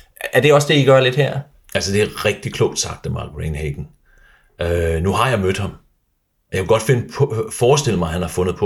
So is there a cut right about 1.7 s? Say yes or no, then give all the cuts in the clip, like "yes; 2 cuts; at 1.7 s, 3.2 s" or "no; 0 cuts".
no; 0 cuts